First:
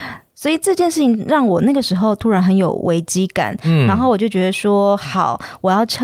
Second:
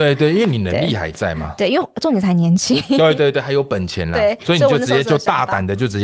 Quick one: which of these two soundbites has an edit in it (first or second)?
second